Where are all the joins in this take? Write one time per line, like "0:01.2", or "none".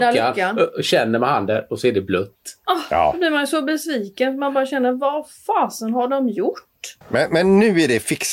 0:07.0